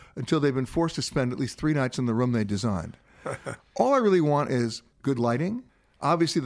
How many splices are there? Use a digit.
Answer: 2